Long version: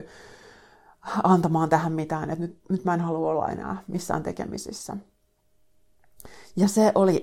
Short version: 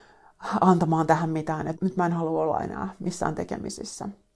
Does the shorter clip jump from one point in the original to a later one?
yes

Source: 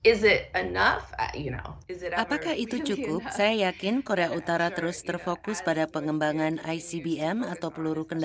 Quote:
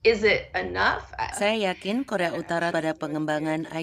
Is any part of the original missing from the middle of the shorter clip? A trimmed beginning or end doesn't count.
yes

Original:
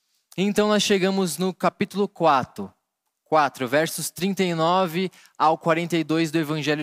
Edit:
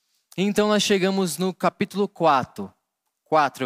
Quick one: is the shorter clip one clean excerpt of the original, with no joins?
yes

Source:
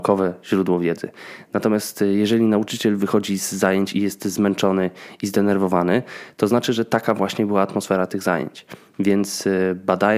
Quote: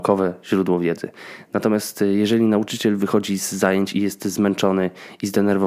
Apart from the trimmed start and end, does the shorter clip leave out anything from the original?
no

